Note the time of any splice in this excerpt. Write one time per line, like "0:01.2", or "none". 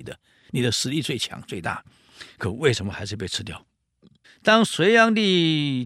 0:04.2